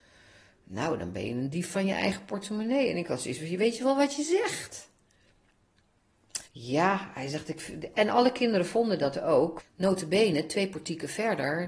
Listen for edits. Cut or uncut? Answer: cut